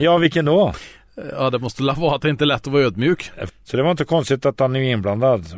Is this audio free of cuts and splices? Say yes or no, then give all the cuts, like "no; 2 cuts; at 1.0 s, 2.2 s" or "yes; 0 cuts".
no; 1 cut; at 3.5 s